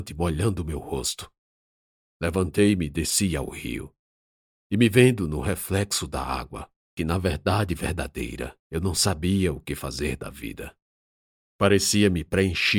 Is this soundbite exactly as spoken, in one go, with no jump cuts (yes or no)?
no